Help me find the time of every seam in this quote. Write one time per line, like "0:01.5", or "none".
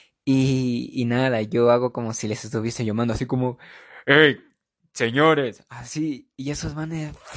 none